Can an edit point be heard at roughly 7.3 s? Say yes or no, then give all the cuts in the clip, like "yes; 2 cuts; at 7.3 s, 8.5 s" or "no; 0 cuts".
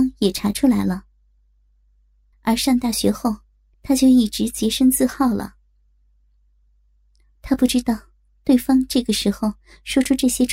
no; 2 cuts; at 2.3 s, 3.7 s